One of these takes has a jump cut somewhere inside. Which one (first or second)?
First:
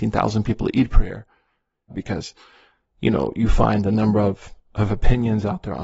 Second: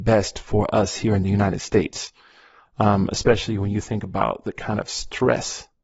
first